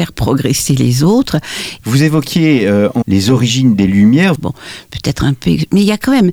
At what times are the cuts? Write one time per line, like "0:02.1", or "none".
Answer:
0:01.8
0:03.0
0:04.3